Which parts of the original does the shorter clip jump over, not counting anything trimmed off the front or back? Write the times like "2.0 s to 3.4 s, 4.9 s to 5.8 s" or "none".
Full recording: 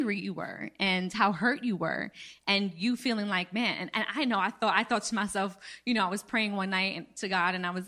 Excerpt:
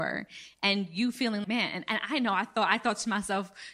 3.3 s to 3.5 s